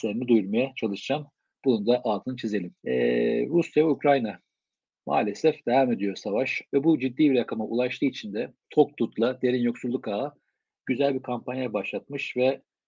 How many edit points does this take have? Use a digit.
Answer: 3